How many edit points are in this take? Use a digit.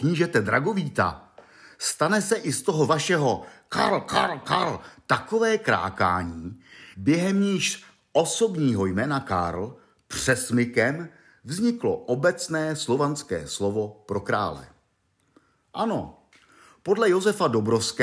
2